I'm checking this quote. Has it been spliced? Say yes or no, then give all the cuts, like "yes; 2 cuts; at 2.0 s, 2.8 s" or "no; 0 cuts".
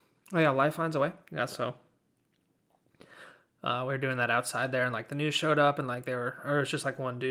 no; 0 cuts